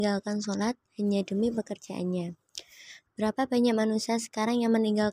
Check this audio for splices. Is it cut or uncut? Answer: cut